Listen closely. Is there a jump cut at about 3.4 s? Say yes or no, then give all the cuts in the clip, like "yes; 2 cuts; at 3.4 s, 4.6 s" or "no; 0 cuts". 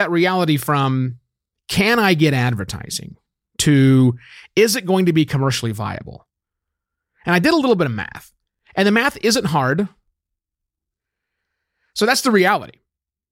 no; 1 cut; at 10.9 s